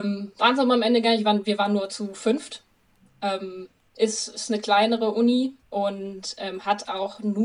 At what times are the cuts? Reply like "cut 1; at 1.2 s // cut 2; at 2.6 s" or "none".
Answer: cut 1; at 5.6 s